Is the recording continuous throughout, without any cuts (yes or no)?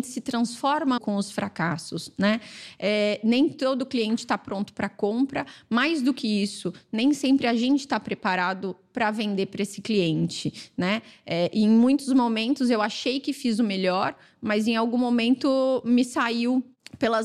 no